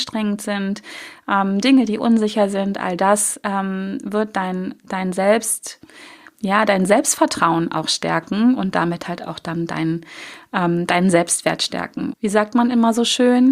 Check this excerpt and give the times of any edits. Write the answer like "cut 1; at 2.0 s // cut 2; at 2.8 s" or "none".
cut 1; at 12.1 s